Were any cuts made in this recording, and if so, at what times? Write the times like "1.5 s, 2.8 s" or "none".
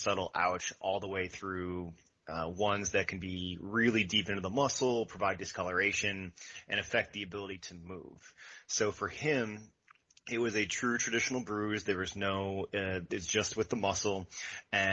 none